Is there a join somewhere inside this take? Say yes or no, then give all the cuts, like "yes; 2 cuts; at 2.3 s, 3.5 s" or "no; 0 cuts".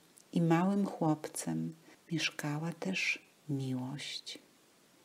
yes; 1 cut; at 1.9 s